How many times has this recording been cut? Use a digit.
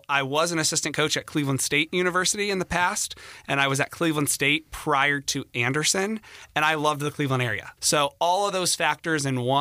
1